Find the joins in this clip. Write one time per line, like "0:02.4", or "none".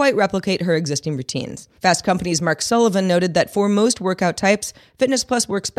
0:01.8